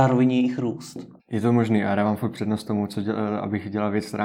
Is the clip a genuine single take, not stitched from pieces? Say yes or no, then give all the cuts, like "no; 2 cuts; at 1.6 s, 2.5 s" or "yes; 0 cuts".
no; 1 cut; at 1.2 s